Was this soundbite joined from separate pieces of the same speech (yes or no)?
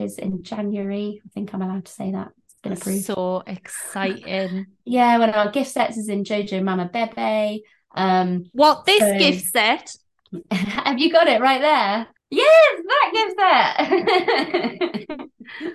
yes